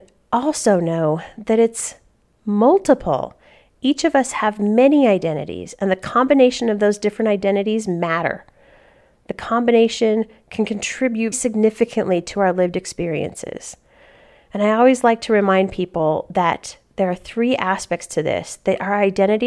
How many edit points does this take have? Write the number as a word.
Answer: one